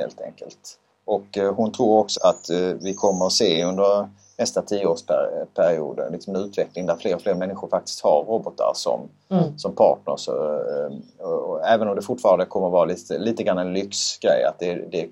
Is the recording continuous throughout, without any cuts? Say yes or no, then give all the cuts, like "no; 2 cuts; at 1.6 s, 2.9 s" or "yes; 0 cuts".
no; 1 cut; at 2.1 s